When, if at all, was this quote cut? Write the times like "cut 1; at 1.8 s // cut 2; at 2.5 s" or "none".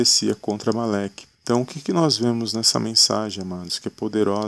cut 1; at 1.3 s